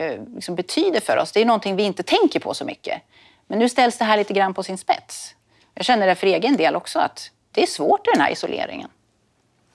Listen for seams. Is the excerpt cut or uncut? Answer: uncut